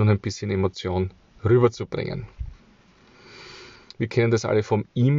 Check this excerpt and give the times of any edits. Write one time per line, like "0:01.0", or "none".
none